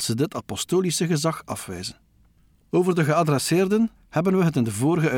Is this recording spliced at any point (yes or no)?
yes